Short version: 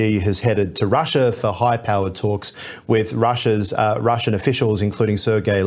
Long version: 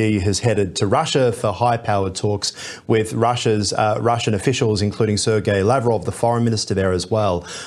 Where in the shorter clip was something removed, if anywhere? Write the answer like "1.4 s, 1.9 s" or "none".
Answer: none